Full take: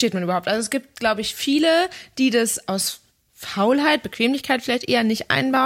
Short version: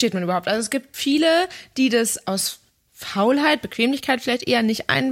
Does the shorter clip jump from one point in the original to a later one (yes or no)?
yes